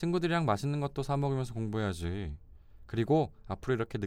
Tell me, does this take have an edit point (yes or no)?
no